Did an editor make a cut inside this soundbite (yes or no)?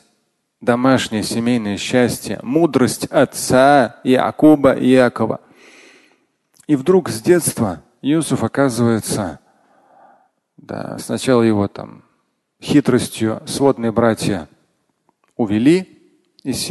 no